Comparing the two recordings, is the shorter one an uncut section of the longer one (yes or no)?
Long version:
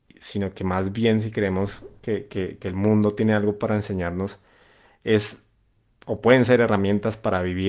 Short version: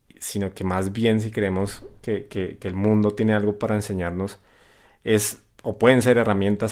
no